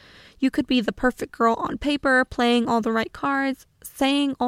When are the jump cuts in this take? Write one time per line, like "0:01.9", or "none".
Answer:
none